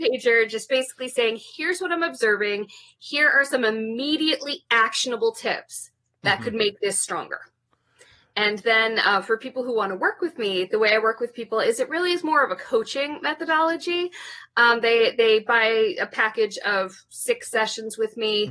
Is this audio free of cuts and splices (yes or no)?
yes